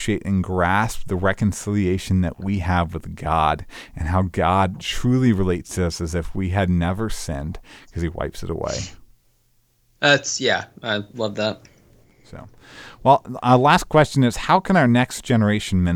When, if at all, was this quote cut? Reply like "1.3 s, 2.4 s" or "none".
none